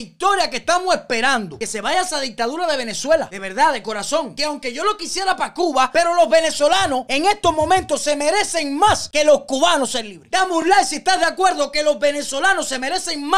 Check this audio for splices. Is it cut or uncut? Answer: uncut